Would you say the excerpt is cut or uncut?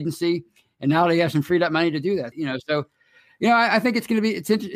cut